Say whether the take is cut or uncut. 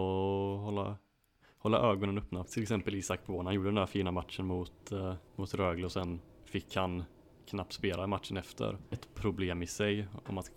cut